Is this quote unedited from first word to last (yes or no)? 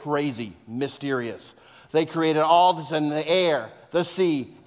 yes